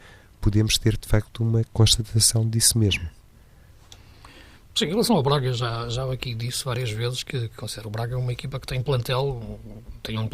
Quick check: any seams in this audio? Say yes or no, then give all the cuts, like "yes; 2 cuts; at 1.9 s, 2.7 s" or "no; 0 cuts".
no; 0 cuts